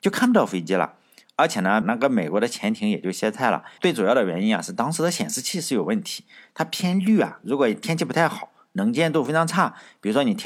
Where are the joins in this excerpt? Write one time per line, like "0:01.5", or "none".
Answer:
0:01.8
0:03.8